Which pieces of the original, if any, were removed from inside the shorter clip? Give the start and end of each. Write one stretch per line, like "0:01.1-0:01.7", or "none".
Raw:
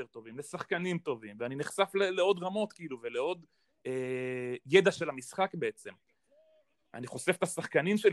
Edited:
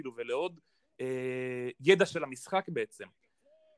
none